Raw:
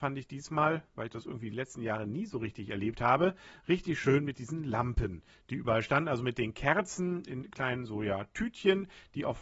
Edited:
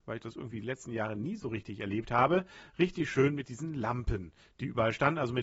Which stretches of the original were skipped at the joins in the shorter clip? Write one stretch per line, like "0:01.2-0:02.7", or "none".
none